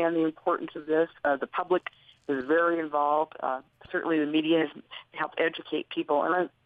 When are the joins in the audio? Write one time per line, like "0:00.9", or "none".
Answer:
none

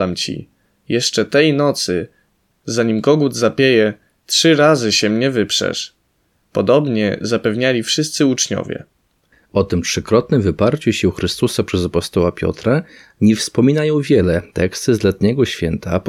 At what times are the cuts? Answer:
0:06.4

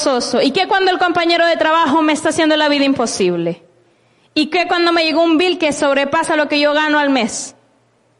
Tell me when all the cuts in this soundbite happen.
none

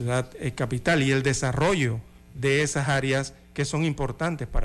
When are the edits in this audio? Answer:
0:02.3

